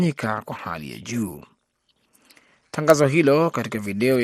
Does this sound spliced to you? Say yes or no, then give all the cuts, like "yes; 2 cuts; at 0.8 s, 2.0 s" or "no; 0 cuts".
no; 0 cuts